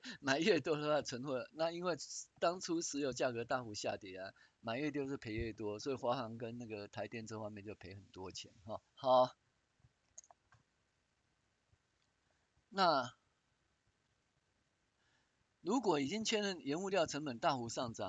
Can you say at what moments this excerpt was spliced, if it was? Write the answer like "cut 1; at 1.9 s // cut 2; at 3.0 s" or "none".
cut 1; at 8.9 s